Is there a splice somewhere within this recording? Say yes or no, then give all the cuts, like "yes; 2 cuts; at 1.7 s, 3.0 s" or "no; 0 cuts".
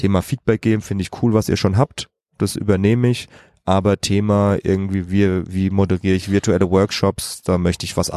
no; 0 cuts